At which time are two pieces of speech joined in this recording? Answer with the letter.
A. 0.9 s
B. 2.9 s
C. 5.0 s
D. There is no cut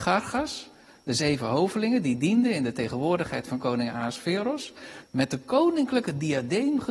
C